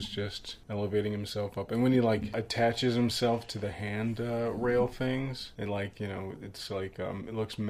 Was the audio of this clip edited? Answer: no; 0 cuts

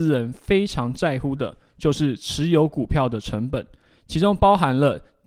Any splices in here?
no; 0 cuts

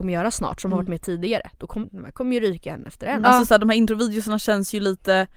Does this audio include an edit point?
yes; 2 cuts; at 1.8 s, 3.2 s

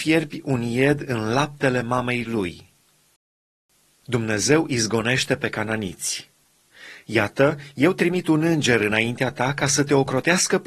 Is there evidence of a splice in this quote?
no; 0 cuts

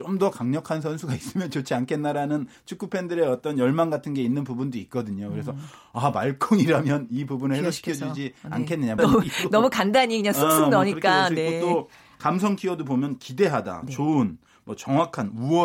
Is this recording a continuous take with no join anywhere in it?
no; 1 cut; at 9.0 s

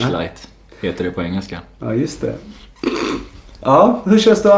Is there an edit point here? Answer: no; 0 cuts

